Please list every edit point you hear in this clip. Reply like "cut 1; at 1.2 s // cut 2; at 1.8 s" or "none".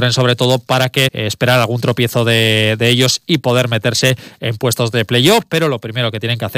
cut 1; at 1.1 s